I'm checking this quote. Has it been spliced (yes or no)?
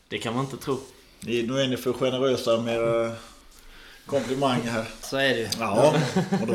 yes